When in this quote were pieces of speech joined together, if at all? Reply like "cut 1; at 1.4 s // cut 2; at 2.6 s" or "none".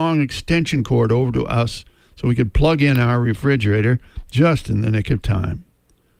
none